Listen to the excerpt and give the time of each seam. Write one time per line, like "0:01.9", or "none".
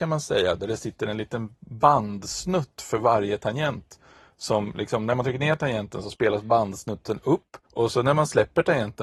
0:07.6